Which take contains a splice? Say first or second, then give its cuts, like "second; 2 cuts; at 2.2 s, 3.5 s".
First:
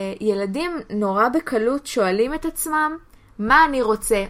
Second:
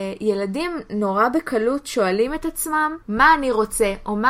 second; 1 cut; at 3.0 s